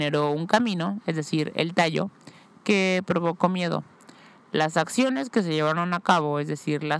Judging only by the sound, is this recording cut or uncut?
uncut